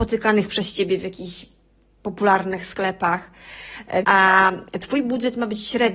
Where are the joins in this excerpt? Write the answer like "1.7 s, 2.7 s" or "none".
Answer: 4.0 s